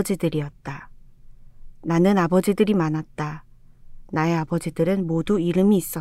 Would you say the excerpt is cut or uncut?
uncut